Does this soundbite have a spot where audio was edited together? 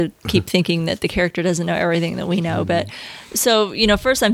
no; 0 cuts

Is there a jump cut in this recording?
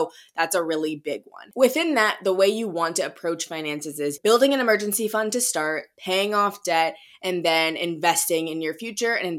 no; 0 cuts

